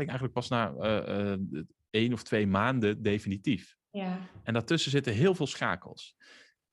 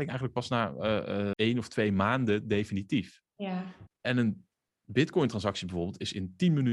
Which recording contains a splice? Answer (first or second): second